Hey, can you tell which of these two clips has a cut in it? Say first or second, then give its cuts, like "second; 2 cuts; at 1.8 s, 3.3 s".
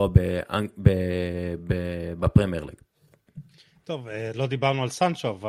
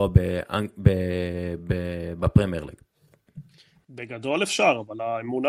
second; 1 cut; at 3.8 s